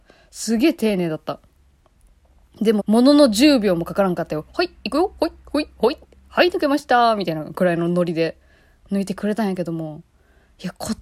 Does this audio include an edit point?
yes; 1 cut; at 2.8 s

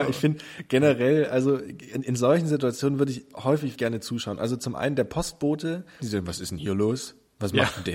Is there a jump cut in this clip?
yes; 2 cuts; at 3.7 s, 6.0 s

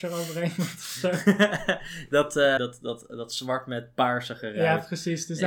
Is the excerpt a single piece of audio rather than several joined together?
no; 1 cut; at 2.6 s

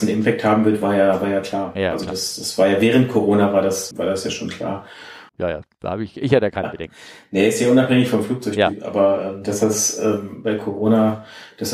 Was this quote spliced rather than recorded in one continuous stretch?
yes; 2 cuts; at 3.9 s, 5.3 s

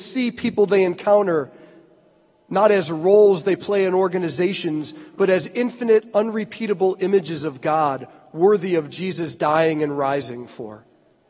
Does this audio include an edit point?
no; 0 cuts

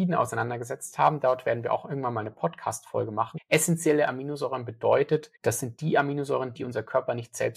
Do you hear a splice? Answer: yes; 3 cuts; at 3.4 s, 5.4 s, 6.5 s

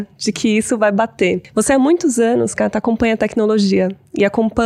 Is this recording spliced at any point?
no; 0 cuts

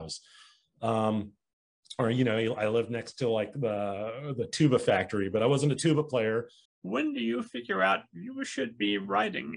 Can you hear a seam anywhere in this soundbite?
yes; 1 cut; at 6.7 s

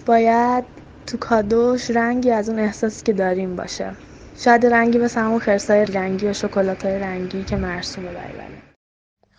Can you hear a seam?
yes; 1 cut; at 5.9 s

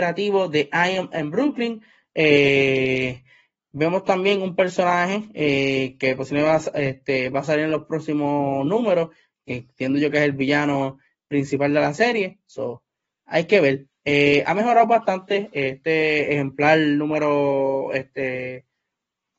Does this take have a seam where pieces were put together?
no; 0 cuts

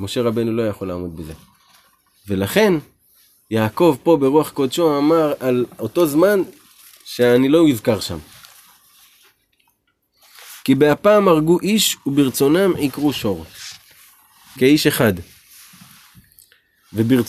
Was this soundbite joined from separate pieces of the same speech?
yes; 1 cut; at 14.6 s

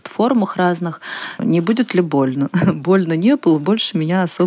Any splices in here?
yes; 1 cut; at 1.4 s

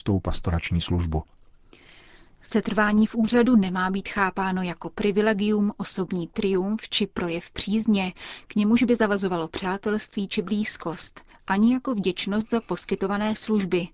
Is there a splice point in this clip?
no; 0 cuts

